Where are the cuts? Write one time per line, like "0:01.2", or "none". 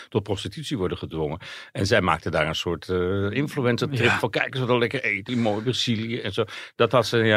0:05.3